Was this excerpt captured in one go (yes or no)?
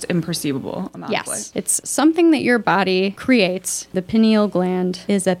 no